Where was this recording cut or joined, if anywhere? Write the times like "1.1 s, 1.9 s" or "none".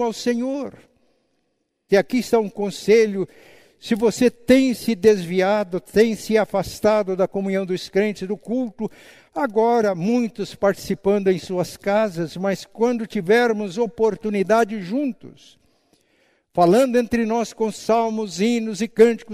1.9 s